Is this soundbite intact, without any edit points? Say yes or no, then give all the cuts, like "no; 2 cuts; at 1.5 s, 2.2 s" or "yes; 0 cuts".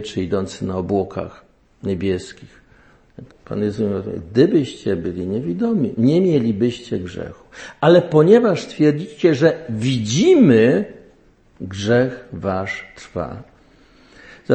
no; 1 cut; at 3.3 s